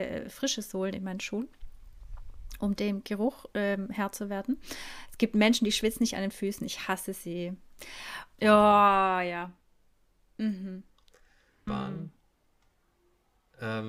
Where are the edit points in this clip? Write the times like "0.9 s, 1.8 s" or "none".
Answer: 8.4 s, 11.7 s